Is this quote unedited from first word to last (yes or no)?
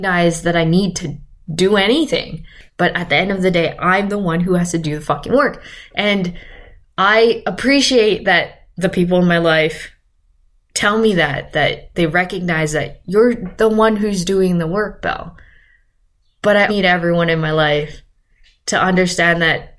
no